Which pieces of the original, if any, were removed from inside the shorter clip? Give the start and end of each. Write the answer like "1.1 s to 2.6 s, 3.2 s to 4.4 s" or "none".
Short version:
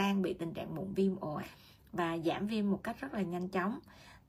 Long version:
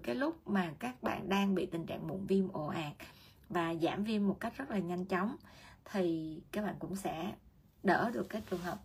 2.7 s to 3.0 s